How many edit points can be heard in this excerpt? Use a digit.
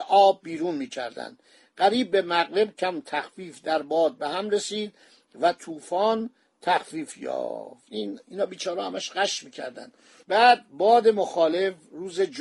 1